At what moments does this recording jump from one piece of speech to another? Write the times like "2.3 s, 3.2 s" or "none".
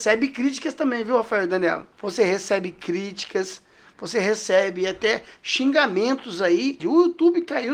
1.9 s, 6.8 s